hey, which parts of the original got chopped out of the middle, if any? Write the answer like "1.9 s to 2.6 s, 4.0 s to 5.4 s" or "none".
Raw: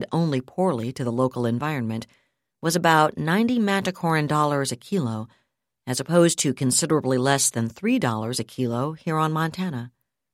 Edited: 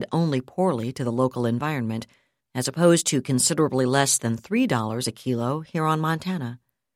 2.4 s to 5.7 s

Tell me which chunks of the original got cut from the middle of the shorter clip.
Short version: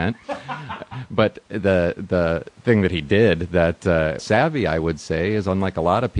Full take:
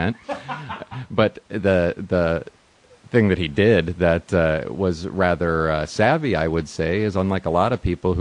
2.5 s to 3.0 s, 4.7 s to 5.9 s

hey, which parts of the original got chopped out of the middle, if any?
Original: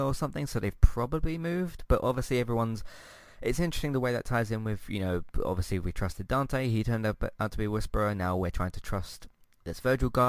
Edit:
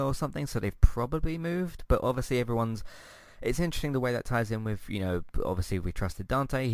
none

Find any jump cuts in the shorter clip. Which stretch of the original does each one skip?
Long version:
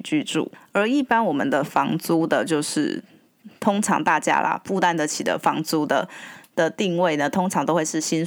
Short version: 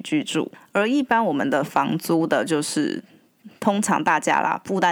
none

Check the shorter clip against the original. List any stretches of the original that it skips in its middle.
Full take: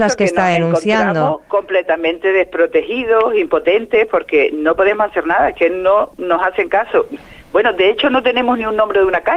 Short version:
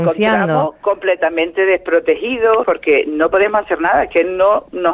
3.3 s to 4.1 s

